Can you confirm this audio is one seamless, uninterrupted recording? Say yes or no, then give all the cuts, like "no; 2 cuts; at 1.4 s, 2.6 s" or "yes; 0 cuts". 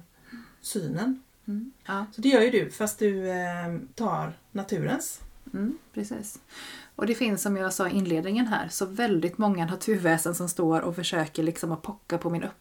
no; 2 cuts; at 1.9 s, 3.9 s